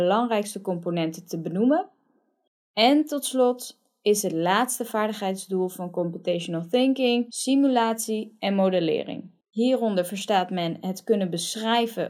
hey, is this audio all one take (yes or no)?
no